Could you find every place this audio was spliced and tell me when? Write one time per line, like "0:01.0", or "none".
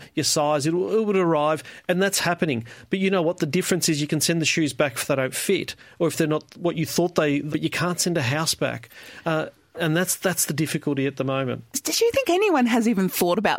0:07.5

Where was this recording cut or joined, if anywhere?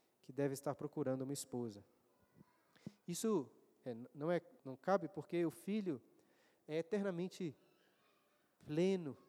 0:04.6

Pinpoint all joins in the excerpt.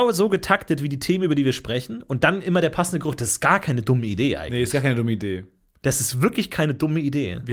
none

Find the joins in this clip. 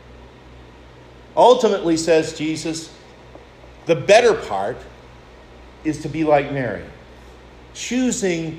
none

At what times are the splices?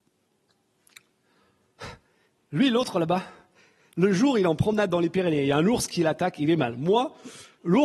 none

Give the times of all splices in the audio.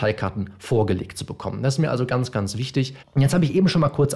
0:03.0

